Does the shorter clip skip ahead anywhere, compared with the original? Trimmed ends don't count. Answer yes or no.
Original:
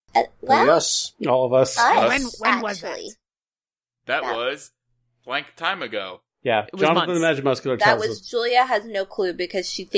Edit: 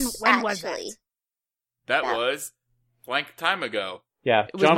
no